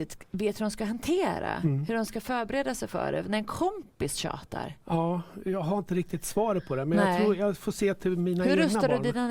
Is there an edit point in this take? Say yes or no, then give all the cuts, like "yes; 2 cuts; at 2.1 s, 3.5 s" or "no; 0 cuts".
yes; 1 cut; at 4.8 s